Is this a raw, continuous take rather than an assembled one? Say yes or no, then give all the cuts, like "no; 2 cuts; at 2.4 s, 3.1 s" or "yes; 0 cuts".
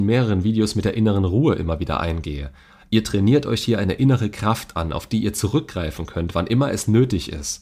yes; 0 cuts